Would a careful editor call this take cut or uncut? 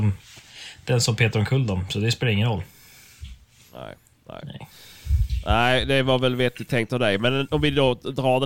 uncut